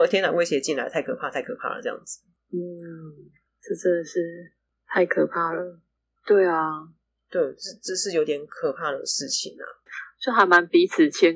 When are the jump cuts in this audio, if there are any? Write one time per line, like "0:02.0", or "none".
0:06.2
0:09.9